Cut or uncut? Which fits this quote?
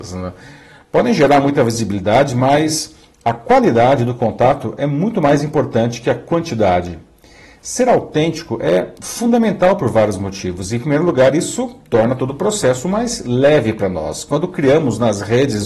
uncut